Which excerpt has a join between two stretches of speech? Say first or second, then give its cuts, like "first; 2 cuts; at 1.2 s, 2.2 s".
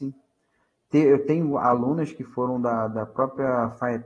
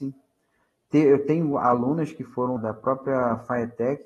second; 1 cut; at 2.6 s